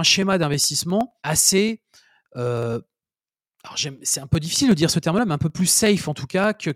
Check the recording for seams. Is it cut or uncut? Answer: cut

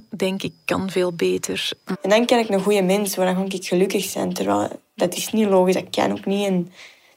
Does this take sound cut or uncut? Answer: cut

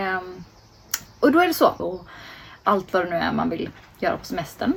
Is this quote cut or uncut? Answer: cut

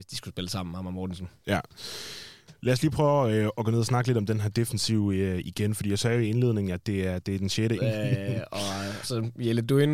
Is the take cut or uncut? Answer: cut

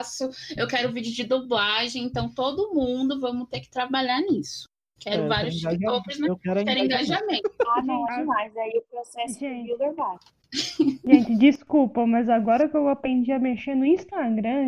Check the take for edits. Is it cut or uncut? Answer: cut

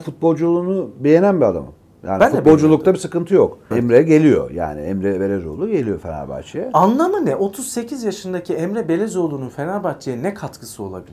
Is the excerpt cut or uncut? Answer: cut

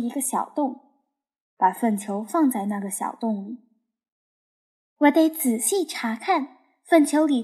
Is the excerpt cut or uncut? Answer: uncut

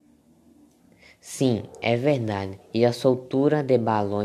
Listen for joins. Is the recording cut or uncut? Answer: uncut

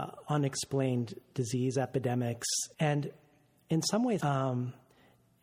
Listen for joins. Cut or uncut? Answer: cut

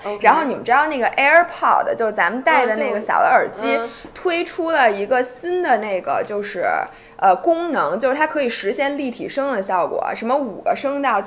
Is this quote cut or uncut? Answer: uncut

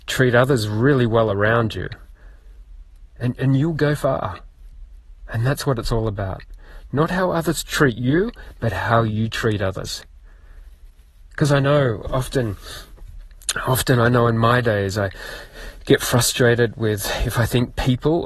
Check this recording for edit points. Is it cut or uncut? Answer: uncut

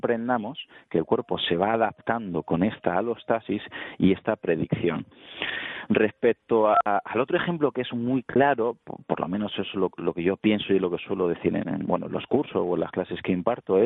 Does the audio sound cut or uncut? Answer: uncut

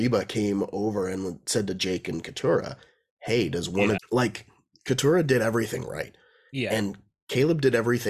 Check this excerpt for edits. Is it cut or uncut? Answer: cut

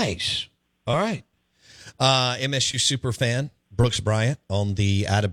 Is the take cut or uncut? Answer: uncut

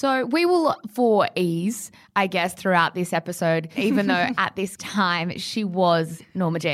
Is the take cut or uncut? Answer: cut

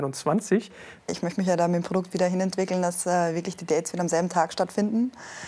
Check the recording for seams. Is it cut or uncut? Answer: cut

